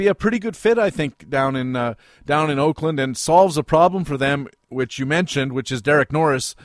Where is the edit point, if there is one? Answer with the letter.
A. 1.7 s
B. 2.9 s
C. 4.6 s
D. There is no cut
D